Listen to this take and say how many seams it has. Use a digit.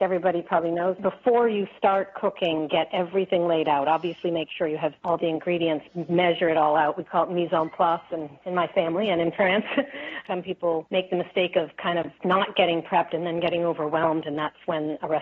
0